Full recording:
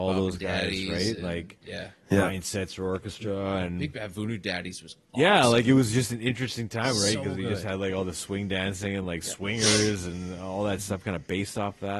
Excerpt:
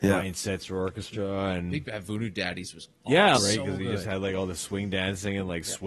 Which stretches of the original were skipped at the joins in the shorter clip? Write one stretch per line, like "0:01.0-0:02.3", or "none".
0:05.4-0:06.9